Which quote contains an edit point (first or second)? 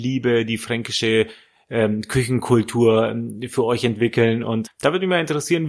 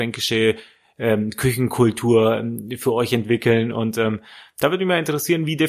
first